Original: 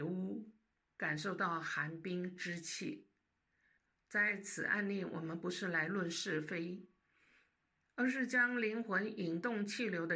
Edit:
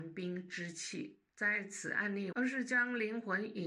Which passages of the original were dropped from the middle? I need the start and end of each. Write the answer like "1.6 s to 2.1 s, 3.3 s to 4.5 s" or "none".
3.2 s to 4.0 s, 5.1 s to 7.9 s